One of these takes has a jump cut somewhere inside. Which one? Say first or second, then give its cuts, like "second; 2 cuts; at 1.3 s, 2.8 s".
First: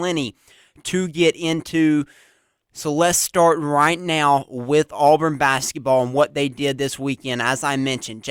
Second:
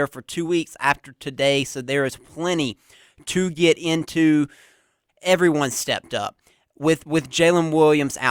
second; 1 cut; at 5.1 s